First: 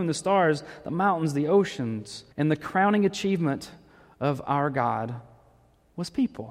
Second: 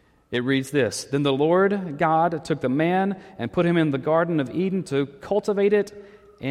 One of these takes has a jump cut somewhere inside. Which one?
first; 1 cut; at 2.3 s

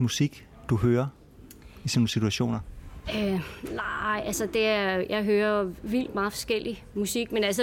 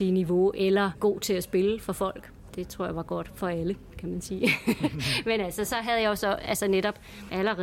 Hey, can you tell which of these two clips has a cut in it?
second; 1 cut; at 2.5 s

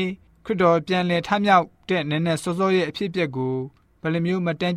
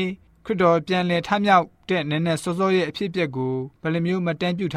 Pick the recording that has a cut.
second; 1 cut; at 3.8 s

